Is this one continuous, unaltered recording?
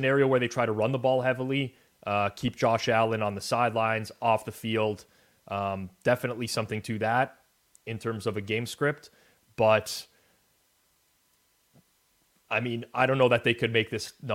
yes; 0 cuts

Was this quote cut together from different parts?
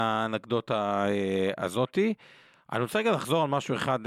no; 0 cuts

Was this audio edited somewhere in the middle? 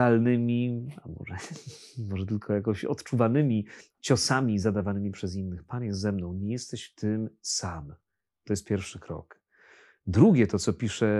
no; 0 cuts

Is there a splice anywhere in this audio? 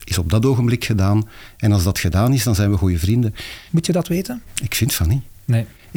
yes; 1 cut; at 3.7 s

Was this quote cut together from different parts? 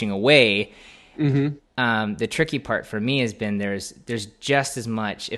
no; 0 cuts

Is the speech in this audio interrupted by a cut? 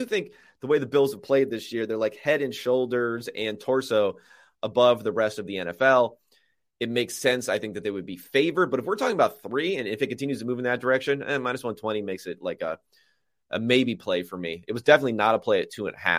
no; 0 cuts

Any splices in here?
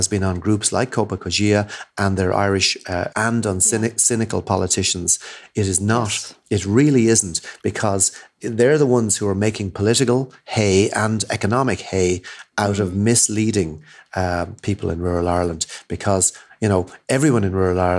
yes; 1 cut; at 3.1 s

